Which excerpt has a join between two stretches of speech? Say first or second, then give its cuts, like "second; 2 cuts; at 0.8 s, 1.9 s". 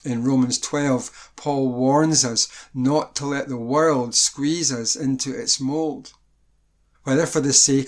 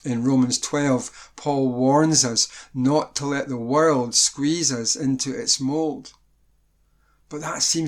first; 1 cut; at 6.9 s